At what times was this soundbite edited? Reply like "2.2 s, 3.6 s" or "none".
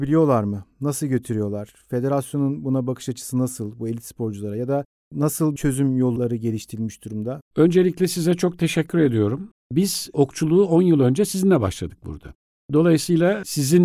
9.5 s